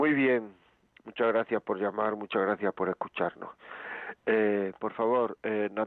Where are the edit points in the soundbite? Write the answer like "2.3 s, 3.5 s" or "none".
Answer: 4.8 s